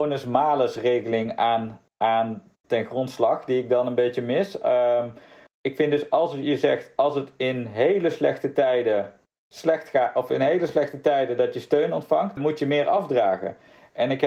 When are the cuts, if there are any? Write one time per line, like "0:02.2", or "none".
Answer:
0:05.5
0:12.4